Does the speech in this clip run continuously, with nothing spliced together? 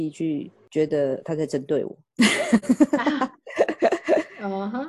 yes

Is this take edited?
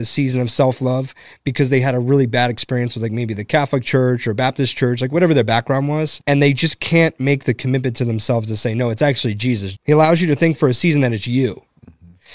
yes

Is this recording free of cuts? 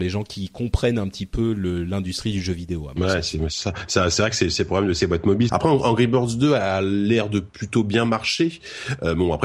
no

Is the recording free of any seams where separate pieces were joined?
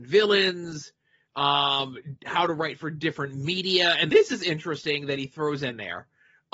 no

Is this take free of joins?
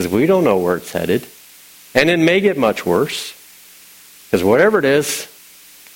no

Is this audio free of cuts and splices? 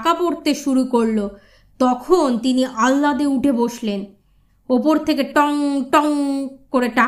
no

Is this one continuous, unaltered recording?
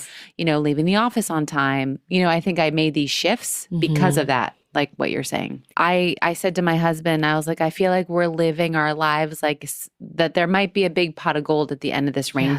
no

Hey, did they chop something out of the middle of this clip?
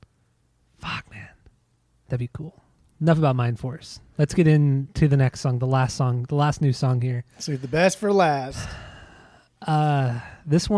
no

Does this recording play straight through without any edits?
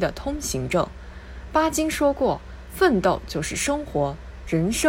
yes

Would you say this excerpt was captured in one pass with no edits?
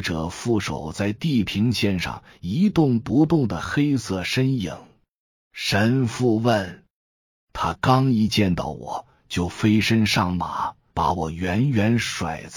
no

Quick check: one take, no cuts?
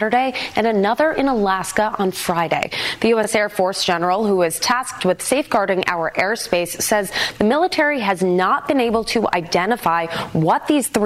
yes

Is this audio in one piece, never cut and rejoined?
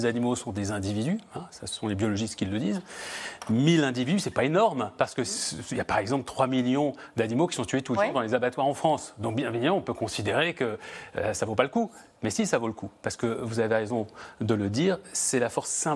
yes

